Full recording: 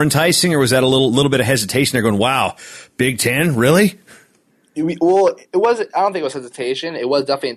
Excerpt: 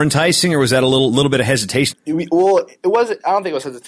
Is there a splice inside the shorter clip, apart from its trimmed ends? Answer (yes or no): yes